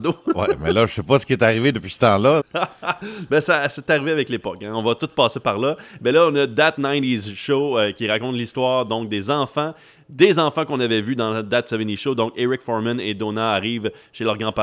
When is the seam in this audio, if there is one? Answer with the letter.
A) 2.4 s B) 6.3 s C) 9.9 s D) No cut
A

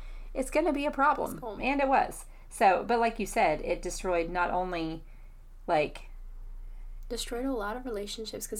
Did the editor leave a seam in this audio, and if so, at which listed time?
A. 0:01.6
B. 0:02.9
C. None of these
A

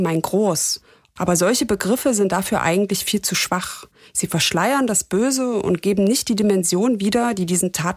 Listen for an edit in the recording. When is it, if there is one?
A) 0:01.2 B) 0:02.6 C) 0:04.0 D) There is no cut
A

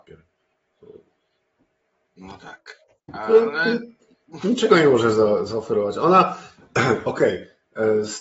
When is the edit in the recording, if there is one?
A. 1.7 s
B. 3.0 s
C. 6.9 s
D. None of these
B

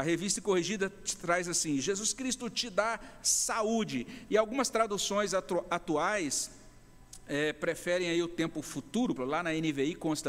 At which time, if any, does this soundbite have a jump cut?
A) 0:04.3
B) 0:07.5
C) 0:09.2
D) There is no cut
C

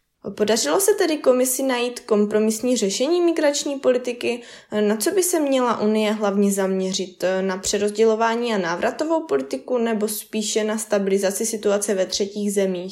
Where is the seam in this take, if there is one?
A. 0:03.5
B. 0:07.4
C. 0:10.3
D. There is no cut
D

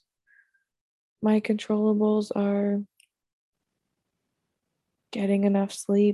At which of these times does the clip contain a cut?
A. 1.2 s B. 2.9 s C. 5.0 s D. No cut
A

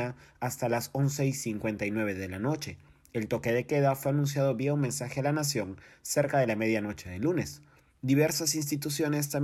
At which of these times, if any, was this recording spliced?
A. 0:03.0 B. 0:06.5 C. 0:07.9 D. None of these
C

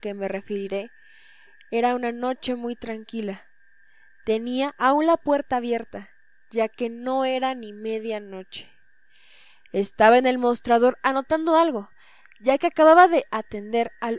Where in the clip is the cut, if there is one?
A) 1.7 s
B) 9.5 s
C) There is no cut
C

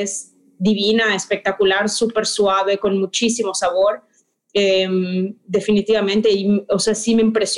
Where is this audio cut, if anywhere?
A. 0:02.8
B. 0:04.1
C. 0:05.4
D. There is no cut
D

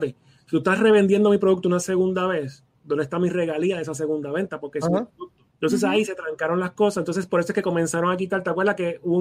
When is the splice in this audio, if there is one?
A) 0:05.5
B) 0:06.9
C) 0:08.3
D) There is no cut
A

